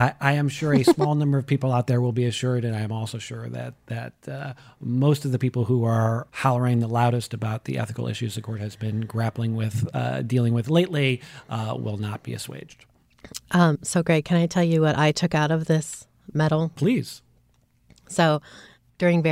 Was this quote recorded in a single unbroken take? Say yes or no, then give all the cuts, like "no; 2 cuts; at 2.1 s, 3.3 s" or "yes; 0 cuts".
yes; 0 cuts